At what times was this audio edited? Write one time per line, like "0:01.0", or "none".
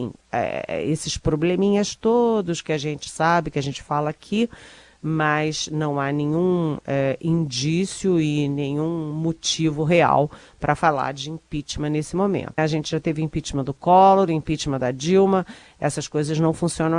0:12.6